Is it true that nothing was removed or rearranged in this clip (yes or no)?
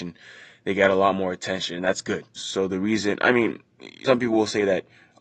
no